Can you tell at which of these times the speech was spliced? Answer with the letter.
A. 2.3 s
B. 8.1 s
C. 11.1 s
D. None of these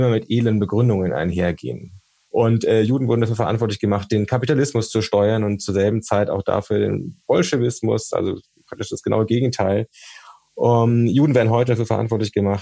A